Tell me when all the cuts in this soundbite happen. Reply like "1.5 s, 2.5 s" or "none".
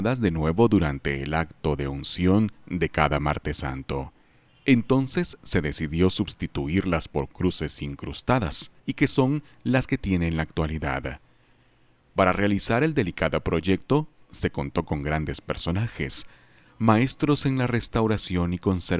4.5 s, 8.8 s